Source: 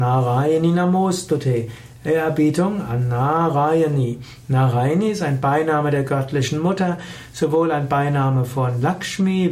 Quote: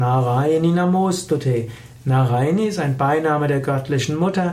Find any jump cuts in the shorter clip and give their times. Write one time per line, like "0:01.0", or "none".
0:02.0